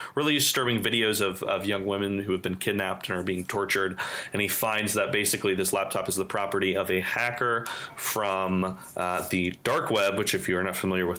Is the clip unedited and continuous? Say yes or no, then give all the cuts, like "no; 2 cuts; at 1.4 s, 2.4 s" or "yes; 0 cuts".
yes; 0 cuts